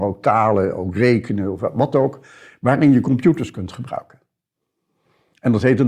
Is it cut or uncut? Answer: uncut